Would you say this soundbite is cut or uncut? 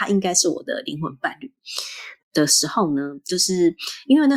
cut